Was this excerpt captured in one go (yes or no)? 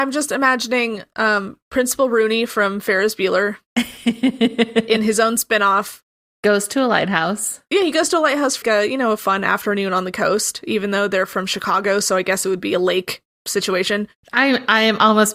no